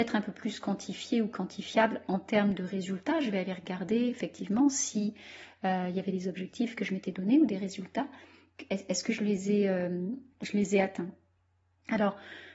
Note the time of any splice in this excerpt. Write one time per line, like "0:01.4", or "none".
none